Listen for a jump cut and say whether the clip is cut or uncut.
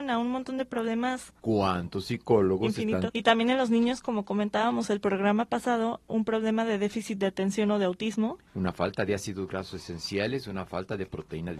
cut